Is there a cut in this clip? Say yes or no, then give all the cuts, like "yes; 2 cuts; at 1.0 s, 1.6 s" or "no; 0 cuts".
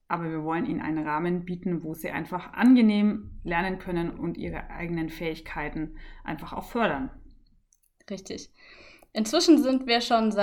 no; 0 cuts